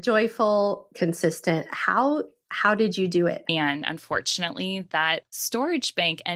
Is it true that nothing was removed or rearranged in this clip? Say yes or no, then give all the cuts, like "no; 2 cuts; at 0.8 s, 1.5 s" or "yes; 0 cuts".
no; 2 cuts; at 0.9 s, 3.4 s